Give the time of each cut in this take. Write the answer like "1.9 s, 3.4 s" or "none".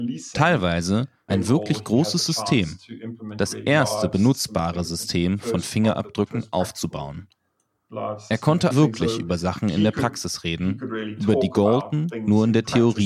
1.3 s, 8.7 s